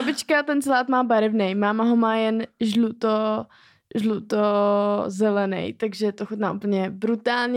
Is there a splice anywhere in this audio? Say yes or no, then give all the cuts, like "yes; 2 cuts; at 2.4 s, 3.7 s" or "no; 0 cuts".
no; 0 cuts